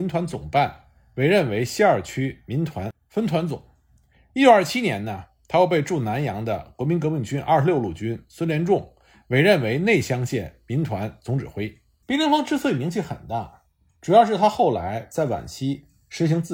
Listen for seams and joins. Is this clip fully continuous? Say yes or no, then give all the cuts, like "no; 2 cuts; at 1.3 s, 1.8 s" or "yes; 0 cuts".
no; 1 cut; at 12.0 s